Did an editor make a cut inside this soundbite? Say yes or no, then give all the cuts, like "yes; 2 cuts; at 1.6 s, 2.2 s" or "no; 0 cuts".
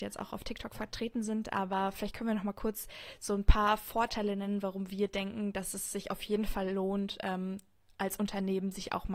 no; 0 cuts